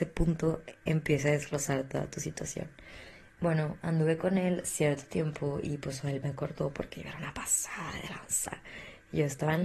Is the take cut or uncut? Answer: uncut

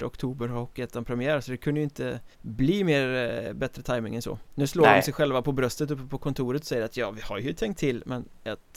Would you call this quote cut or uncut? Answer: cut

